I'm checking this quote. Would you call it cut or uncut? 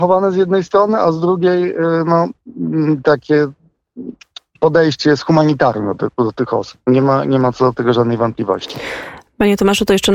uncut